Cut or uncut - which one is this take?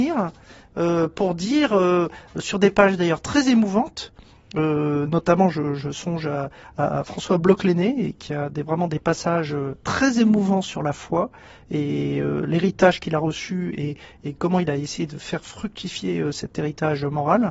uncut